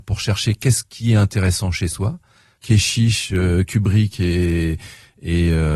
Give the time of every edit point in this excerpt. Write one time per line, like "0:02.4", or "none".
0:02.6